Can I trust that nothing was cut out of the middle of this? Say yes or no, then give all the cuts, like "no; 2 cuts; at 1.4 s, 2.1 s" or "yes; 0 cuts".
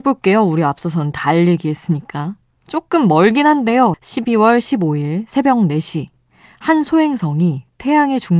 no; 1 cut; at 3.9 s